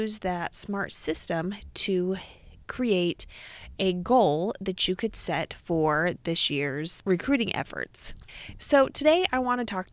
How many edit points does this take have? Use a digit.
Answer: 1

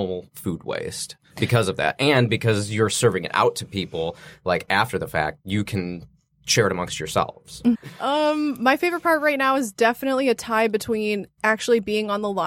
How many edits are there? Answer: 1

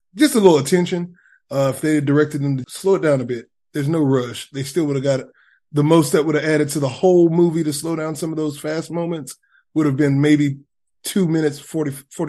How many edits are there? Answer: 1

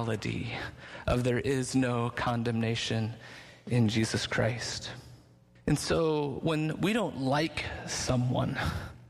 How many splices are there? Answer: 1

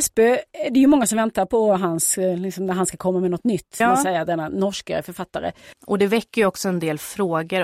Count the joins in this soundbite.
2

